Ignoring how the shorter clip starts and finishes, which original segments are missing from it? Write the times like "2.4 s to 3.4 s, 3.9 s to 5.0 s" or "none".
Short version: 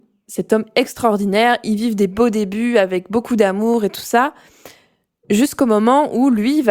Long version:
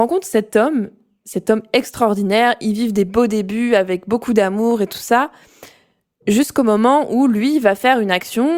none